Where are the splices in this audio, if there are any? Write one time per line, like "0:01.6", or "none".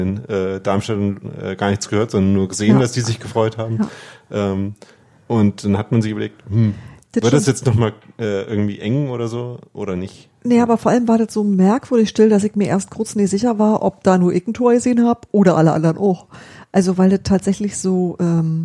none